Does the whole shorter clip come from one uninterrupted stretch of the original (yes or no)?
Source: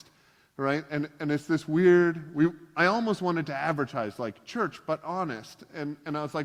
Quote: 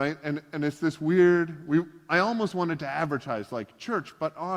yes